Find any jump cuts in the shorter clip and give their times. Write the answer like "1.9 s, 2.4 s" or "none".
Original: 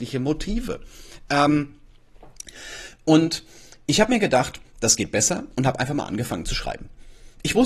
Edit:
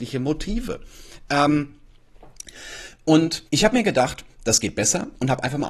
3.5 s